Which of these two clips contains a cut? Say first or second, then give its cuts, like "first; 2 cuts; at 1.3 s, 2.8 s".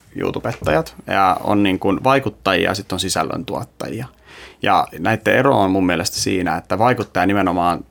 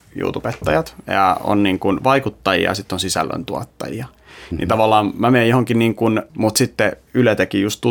second; 2 cuts; at 4.5 s, 6.3 s